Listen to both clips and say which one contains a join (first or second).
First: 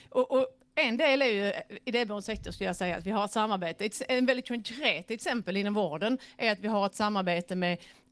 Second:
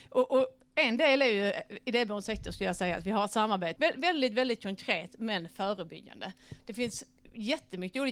second